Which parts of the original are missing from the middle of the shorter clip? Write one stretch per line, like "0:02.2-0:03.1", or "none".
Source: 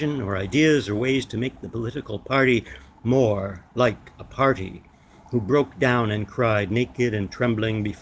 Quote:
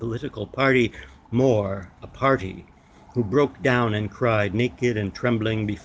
0:03.7-0:04.1